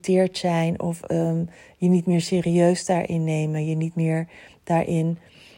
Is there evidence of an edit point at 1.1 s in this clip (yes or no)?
no